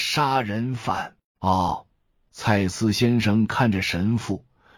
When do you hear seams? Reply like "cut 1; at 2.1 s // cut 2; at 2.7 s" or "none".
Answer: cut 1; at 1.3 s